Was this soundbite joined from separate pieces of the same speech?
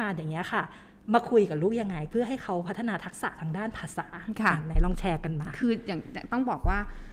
no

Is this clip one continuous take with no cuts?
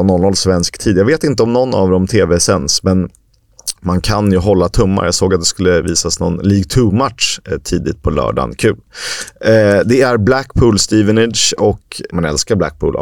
no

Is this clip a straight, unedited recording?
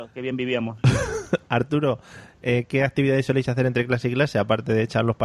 yes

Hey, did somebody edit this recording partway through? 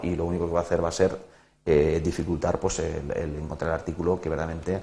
no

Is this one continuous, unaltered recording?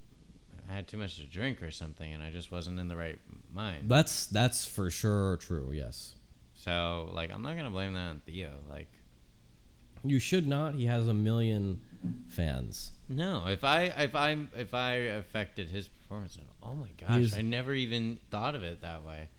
yes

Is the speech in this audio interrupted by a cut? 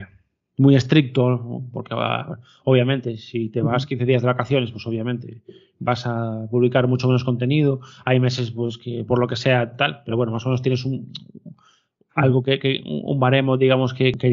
no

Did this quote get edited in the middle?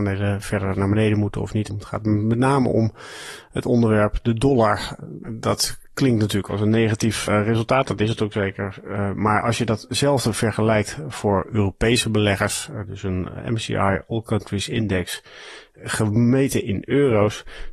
yes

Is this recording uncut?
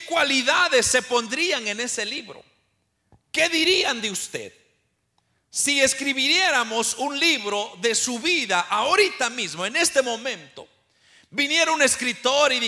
yes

